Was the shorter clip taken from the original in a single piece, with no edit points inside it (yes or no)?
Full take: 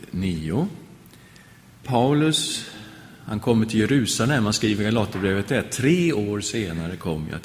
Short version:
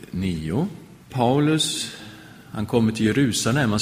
no